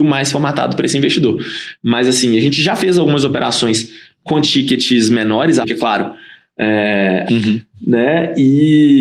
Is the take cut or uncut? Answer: cut